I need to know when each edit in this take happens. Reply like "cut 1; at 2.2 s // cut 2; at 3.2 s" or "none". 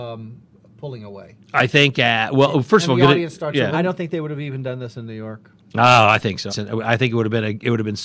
cut 1; at 3.7 s // cut 2; at 6.5 s